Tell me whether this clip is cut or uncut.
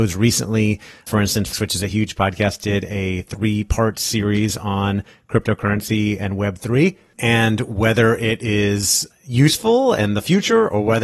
cut